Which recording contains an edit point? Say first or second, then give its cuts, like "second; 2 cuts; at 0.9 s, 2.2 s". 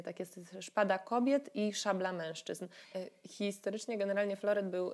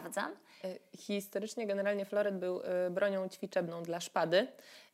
first; 1 cut; at 2.8 s